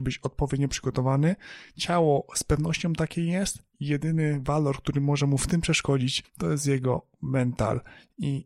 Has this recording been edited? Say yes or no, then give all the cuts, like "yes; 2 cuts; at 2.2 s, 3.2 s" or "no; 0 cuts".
no; 0 cuts